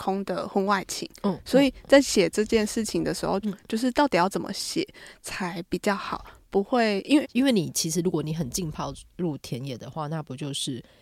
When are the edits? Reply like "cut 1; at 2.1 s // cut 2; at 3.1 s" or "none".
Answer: cut 1; at 3.4 s // cut 2; at 7.2 s